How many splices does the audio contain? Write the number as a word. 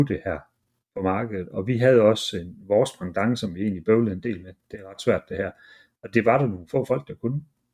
zero